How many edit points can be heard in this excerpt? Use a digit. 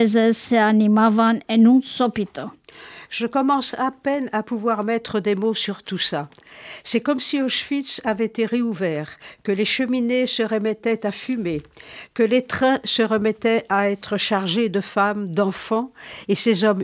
0